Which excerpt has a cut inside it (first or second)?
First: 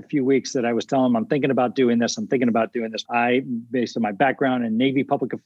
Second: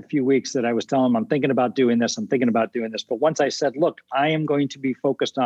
first